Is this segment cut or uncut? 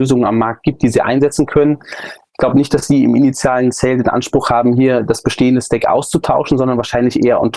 uncut